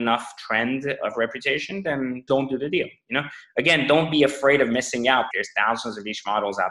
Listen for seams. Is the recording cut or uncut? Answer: cut